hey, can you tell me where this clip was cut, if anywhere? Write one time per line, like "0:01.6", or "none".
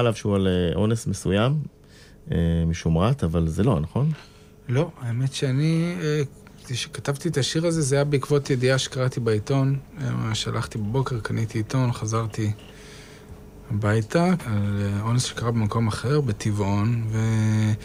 0:14.4